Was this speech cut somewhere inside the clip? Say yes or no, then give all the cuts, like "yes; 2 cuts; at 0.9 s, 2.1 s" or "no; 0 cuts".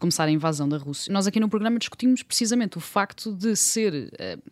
yes; 1 cut; at 1.1 s